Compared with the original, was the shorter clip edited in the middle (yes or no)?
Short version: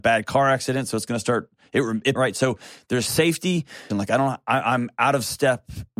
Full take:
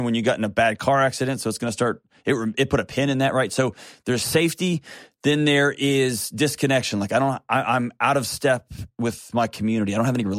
yes